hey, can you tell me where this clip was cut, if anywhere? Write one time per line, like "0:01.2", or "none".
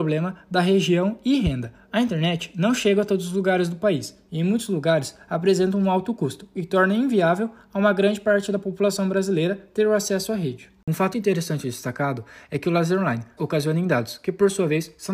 0:11.1
0:13.4